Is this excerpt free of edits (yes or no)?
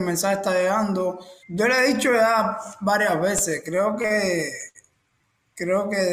no